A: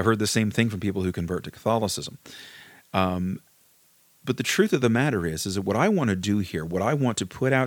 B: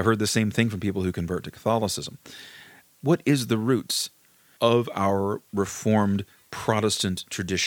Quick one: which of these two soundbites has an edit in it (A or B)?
B